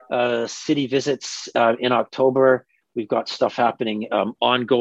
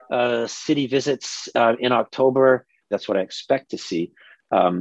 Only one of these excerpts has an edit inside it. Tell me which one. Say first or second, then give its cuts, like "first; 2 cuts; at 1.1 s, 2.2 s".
second; 1 cut; at 2.9 s